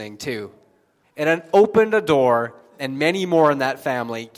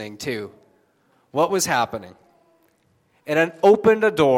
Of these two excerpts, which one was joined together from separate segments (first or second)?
first